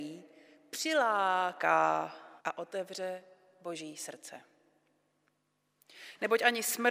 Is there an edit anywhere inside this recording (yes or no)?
yes